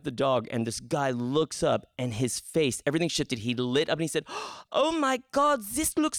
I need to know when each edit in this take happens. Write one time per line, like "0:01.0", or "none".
none